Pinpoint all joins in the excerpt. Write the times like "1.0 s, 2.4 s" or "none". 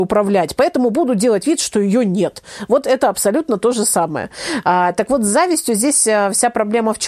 none

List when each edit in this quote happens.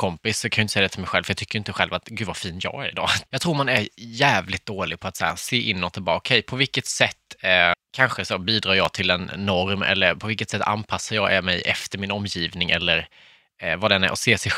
3.3 s, 7.7 s

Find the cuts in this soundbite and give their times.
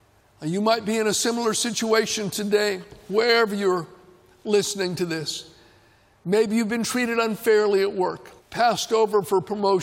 8.4 s

